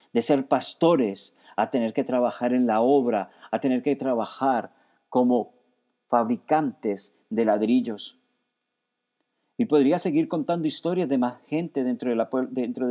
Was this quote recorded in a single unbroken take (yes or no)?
yes